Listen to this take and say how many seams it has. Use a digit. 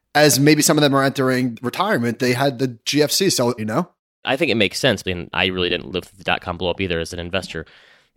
2